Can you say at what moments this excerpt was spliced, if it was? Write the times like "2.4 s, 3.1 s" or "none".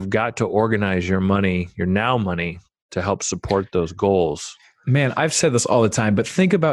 none